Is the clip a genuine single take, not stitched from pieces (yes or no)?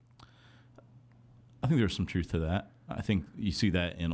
yes